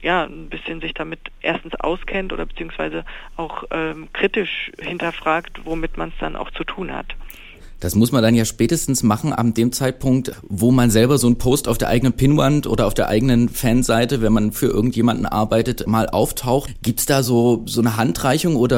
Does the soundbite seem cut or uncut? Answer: uncut